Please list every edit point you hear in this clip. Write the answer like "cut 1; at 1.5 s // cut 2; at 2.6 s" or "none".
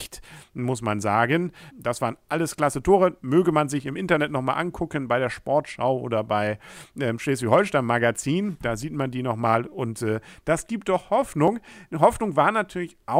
cut 1; at 1.7 s